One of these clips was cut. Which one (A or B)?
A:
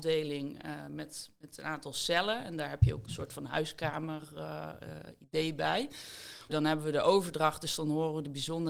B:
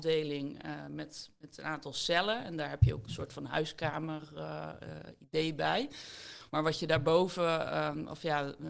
A